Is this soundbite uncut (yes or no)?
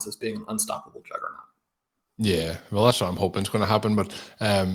yes